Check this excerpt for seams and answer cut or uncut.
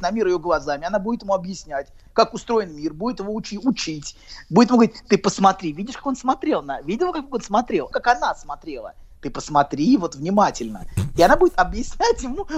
cut